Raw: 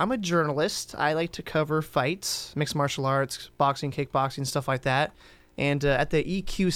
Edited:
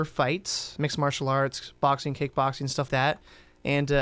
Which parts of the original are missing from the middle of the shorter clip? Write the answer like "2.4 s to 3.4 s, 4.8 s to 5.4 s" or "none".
4.7 s to 4.8 s